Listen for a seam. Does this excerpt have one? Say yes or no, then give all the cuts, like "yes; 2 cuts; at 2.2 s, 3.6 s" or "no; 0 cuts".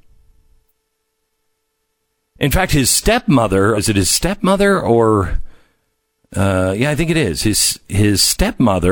yes; 1 cut; at 3.7 s